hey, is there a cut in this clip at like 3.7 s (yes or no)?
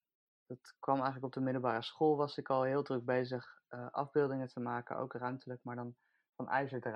no